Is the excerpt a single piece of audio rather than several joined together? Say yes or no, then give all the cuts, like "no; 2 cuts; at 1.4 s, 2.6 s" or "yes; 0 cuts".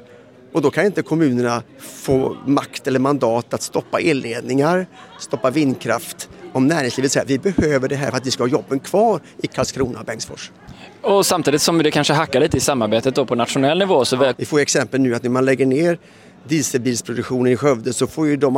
no; 2 cuts; at 1.7 s, 14.3 s